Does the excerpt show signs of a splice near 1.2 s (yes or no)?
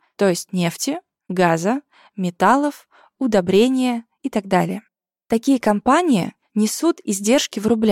no